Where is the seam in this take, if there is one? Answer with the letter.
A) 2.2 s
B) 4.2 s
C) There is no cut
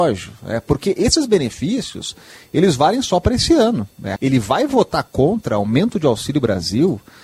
B